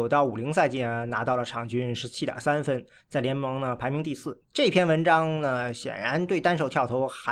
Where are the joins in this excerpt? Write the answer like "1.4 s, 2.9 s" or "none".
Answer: 4.4 s